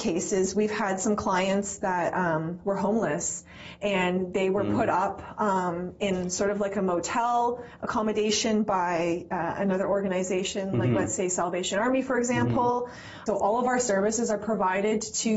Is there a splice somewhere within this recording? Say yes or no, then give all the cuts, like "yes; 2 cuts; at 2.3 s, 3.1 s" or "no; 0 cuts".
yes; 1 cut; at 13.3 s